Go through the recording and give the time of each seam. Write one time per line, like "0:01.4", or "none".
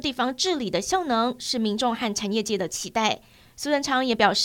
none